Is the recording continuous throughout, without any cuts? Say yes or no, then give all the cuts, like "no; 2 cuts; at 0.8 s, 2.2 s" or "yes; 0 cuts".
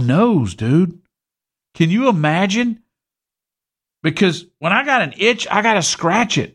yes; 0 cuts